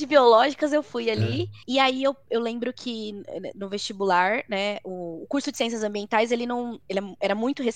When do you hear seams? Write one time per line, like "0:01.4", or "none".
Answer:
none